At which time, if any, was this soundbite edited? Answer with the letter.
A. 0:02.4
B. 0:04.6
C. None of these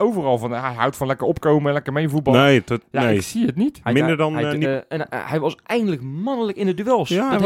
B